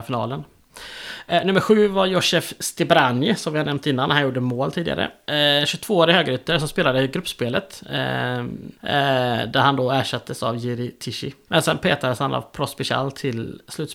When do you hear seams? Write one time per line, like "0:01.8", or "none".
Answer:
0:08.8
0:11.5